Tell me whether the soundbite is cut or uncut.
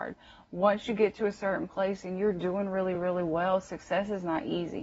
uncut